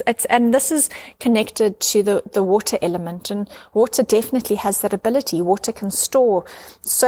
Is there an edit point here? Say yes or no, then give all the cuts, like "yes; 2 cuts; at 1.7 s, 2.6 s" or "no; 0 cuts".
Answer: no; 0 cuts